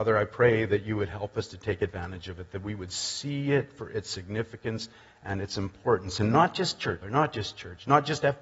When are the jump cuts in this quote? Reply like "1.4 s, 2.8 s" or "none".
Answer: 7.0 s